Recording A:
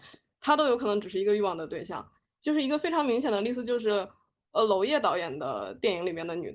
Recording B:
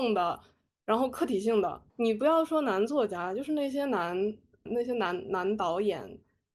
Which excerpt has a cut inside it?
B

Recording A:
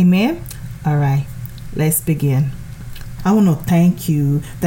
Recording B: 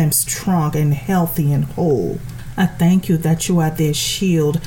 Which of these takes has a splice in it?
A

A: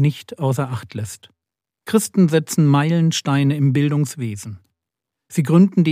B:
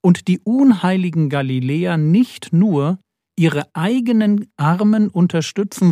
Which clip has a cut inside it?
A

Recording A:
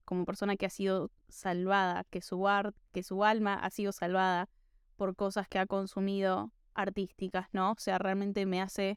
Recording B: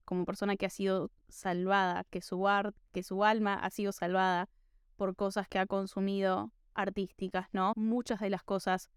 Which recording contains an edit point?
B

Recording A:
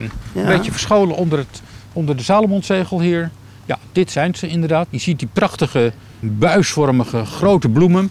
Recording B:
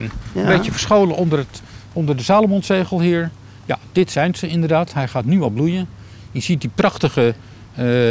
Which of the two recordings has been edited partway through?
A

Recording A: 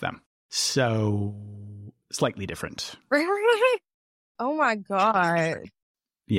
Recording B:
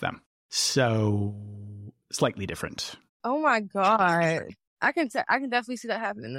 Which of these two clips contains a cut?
B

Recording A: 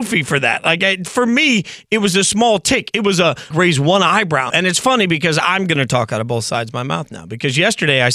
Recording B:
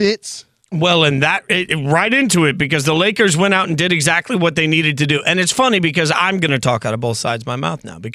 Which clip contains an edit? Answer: A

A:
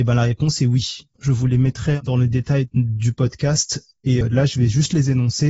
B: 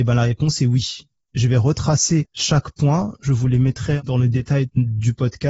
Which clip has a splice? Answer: A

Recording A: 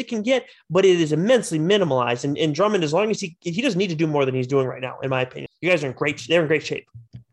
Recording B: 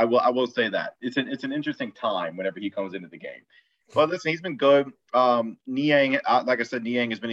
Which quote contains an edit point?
A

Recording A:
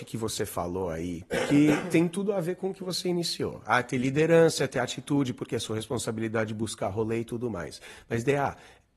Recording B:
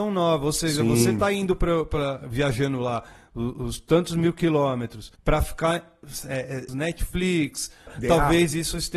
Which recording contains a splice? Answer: B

